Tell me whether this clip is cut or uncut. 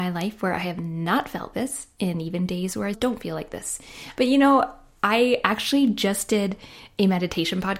cut